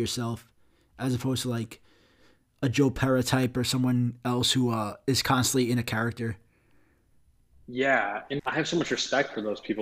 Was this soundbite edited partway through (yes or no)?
yes